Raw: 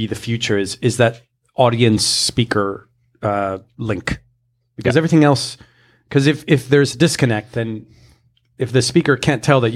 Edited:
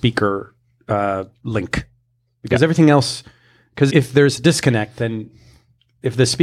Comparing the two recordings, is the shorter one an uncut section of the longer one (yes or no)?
no